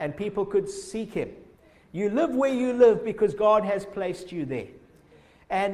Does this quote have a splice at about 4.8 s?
no; 1 cut; at 1.8 s

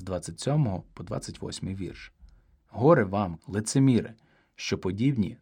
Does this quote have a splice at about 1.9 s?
no; 1 cut; at 3.4 s

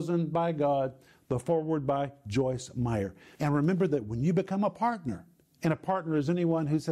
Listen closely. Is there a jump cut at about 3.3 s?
yes; 1 cut; at 3.3 s

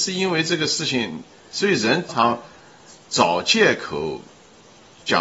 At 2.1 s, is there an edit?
yes; 1 cut; at 2.1 s

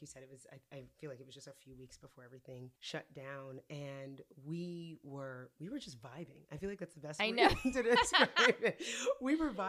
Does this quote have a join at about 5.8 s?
no; 1 cut; at 2.8 s

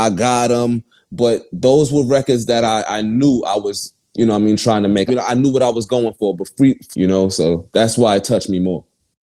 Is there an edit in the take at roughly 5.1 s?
yes; 2 cuts; at 5.1 s, 6.9 s

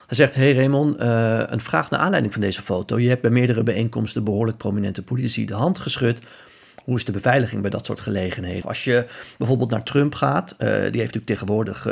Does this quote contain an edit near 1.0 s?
no; 1 cut; at 8.6 s

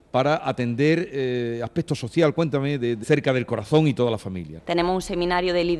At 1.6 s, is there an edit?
no; 2 cuts; at 3.0 s, 4.6 s

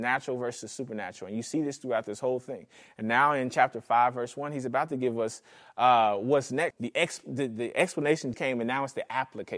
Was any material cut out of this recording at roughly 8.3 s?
yes; 2 cuts; at 6.7 s, 8.3 s

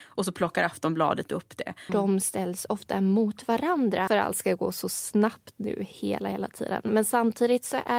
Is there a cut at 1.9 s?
yes; 2 cuts; at 1.9 s, 4.1 s

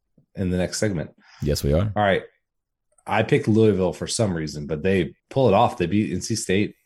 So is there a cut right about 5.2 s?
yes; 1 cut; at 5.2 s

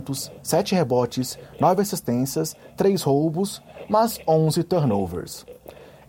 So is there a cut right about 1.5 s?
no; 0 cuts

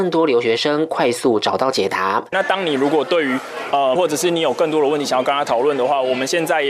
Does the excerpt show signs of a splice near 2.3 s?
yes; 2 cuts; at 2.3 s, 4.0 s

